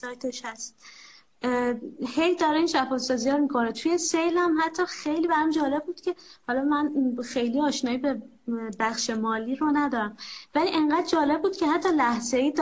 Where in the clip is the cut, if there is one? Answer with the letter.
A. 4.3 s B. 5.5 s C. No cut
C